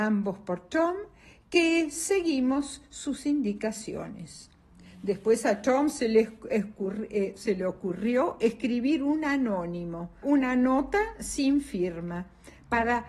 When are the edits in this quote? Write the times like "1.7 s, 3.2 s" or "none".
10.2 s